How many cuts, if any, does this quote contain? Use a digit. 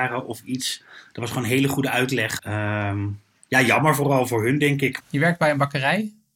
2